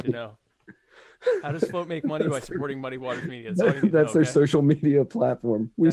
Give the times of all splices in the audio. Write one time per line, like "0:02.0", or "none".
none

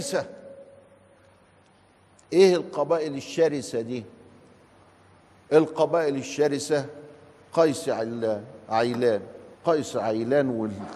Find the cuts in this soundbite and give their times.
0:09.5

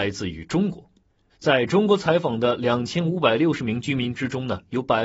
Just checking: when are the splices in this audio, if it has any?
0:01.3

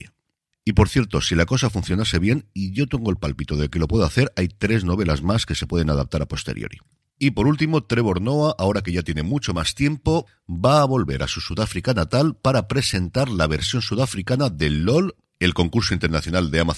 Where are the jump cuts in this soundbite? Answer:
none

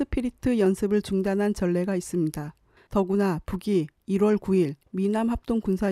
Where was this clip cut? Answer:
0:02.8

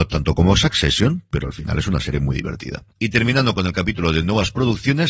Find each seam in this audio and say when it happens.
0:02.9

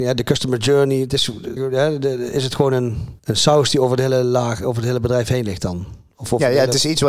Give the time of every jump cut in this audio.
0:01.6
0:03.2

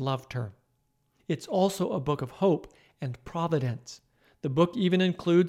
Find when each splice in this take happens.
0:01.2

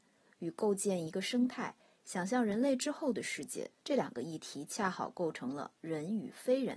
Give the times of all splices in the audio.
0:03.8

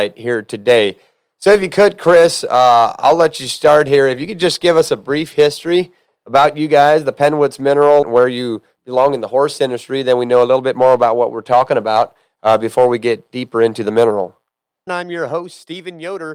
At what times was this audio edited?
0:08.0
0:14.9

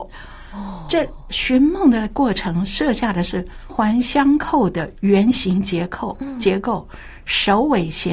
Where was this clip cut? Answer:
0:03.7

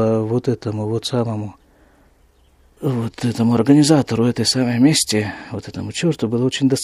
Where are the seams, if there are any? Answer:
none

